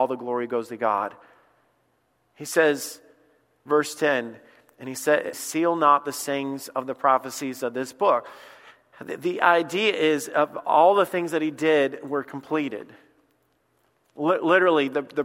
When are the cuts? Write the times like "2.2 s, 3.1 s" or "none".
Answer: 5.3 s